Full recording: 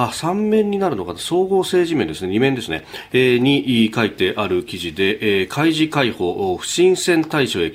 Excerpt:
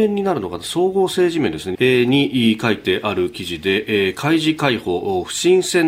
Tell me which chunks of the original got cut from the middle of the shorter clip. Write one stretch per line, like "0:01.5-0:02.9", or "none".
0:02.3-0:03.1